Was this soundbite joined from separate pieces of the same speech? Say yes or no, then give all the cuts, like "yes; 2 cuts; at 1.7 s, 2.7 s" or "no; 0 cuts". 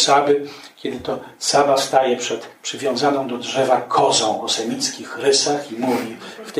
no; 0 cuts